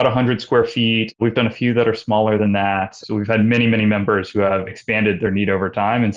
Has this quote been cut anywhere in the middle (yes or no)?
yes